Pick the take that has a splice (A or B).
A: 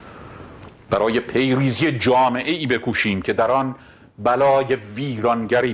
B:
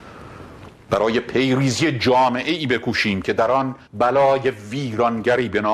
B